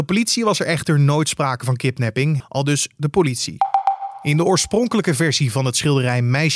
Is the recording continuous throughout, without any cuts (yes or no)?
no